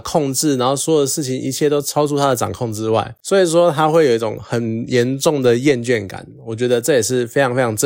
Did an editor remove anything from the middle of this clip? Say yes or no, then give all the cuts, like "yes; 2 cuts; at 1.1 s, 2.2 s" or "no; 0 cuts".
no; 0 cuts